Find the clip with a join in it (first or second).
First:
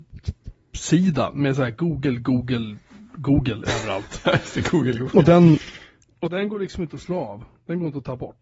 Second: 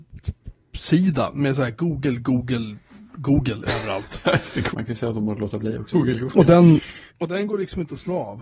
second